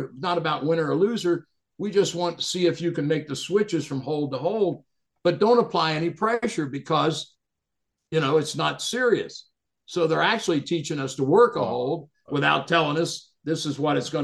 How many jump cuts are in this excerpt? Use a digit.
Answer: 0